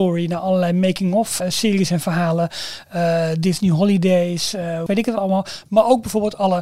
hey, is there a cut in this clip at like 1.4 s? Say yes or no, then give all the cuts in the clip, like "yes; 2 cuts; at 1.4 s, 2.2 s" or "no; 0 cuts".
yes; 2 cuts; at 1.4 s, 4.9 s